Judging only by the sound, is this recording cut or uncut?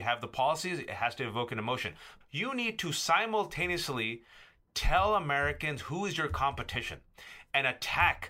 cut